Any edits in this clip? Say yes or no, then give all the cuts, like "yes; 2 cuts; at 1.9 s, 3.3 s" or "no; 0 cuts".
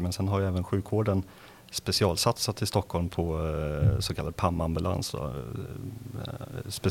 no; 0 cuts